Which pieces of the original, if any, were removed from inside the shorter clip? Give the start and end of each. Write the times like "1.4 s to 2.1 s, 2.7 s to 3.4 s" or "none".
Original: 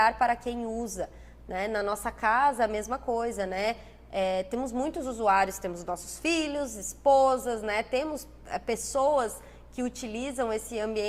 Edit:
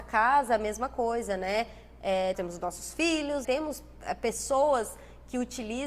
4.4 s to 5.6 s, 6.7 s to 7.9 s